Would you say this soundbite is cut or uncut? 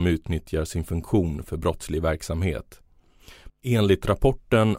cut